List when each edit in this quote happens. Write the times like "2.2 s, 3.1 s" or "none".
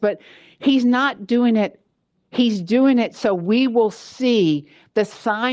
2.1 s